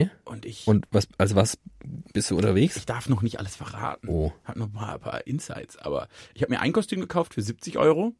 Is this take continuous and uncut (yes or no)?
yes